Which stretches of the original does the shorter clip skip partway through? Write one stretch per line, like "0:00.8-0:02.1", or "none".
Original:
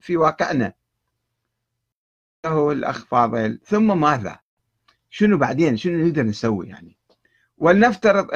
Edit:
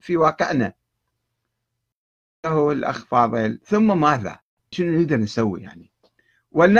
0:04.7-0:05.8